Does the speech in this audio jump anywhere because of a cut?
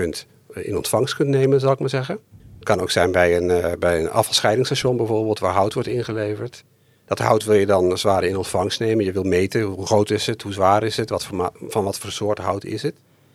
yes; 1 cut; at 2.4 s

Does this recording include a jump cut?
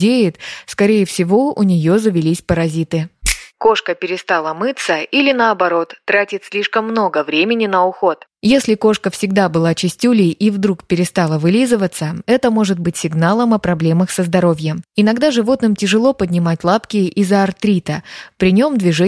no; 0 cuts

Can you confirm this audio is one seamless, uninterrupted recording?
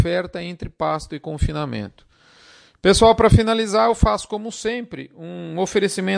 yes; 0 cuts

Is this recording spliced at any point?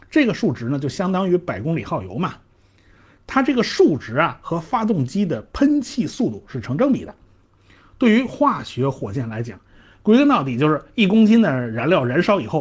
no; 0 cuts

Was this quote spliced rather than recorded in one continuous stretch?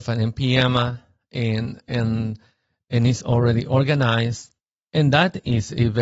no; 0 cuts

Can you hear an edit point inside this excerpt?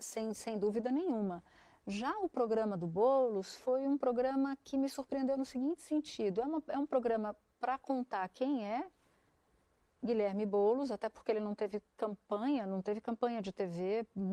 no; 0 cuts

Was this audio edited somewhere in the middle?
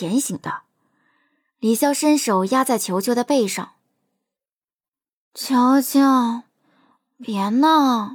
no; 0 cuts

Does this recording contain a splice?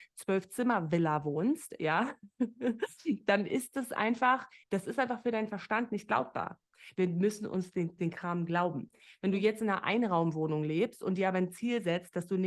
yes; 3 cuts; at 4.6 s, 6.9 s, 8.0 s

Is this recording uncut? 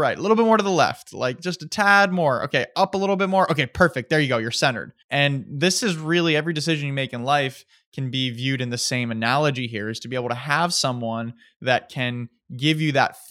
no; 1 cut; at 5.0 s

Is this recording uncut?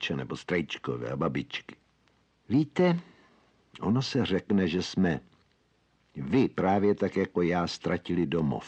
no; 1 cut; at 2.3 s

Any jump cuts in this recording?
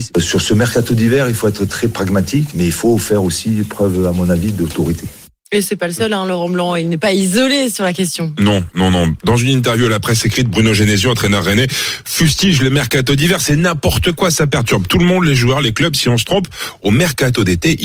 no; 0 cuts

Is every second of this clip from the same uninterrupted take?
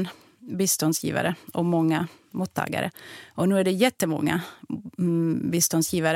yes; 0 cuts

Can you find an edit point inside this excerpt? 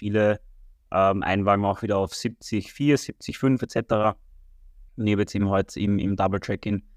yes; 1 cut; at 4.9 s

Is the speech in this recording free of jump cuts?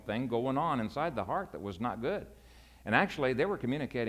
yes; 0 cuts

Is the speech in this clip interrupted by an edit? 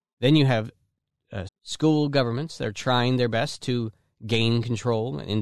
yes; 1 cut; at 1.5 s

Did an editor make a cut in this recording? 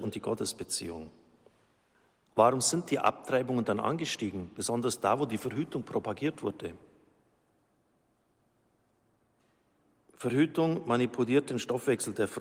yes; 1 cut; at 2.3 s

